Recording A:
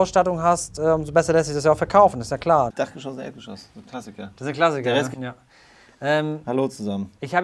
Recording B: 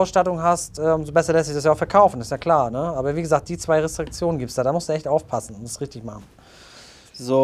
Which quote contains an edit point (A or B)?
A